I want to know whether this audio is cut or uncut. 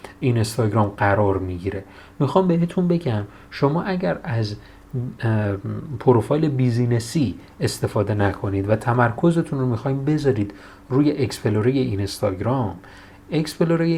uncut